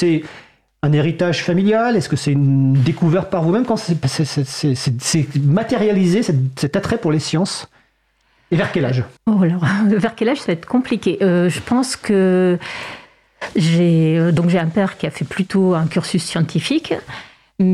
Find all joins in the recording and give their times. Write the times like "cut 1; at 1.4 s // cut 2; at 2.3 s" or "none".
cut 1; at 9.2 s

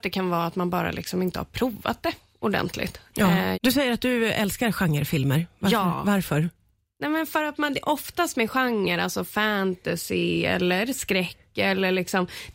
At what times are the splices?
cut 1; at 3.5 s

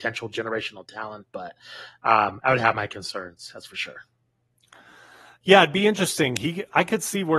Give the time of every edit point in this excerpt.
none

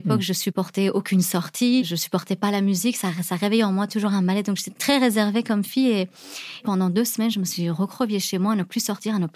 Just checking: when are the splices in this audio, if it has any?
none

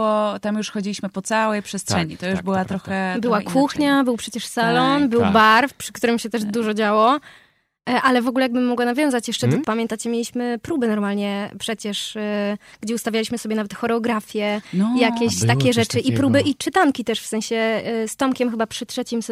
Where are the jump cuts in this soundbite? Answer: cut 1; at 9.6 s

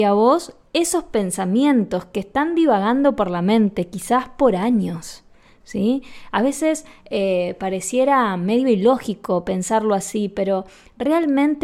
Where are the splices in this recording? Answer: none

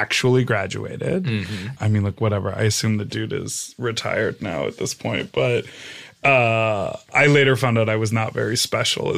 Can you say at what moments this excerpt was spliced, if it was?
cut 1; at 1.8 s

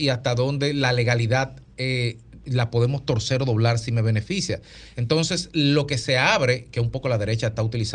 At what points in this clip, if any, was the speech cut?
cut 1; at 4.9 s

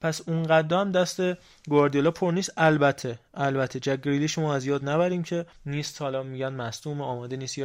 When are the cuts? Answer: cut 1; at 5.5 s

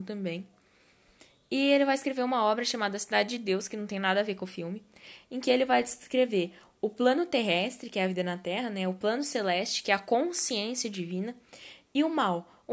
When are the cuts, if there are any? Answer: none

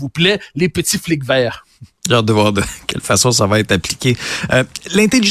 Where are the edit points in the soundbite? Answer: none

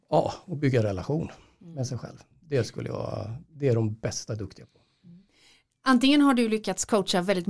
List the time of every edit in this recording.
none

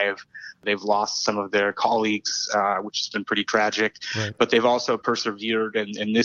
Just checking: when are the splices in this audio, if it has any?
none

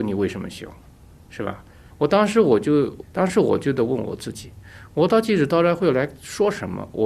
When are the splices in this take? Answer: cut 1; at 1.9 s // cut 2; at 3.0 s

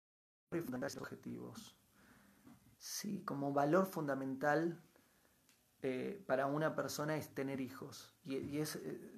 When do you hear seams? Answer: cut 1; at 2.7 s

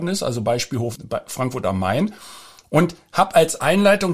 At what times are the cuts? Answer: cut 1; at 1.0 s

